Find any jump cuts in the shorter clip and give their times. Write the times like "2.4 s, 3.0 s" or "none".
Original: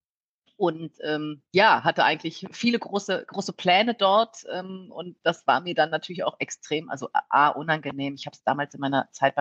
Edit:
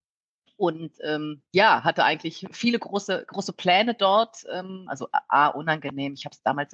4.9 s